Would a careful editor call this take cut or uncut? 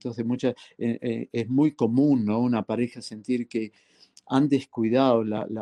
uncut